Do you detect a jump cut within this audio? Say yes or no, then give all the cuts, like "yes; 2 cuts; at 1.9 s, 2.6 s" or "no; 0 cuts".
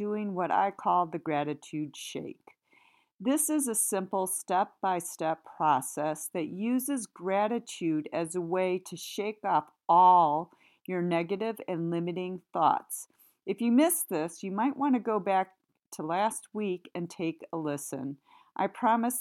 no; 0 cuts